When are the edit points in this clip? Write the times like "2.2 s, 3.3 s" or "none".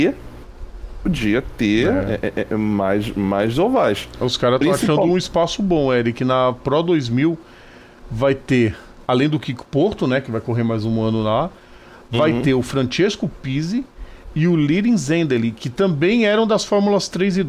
none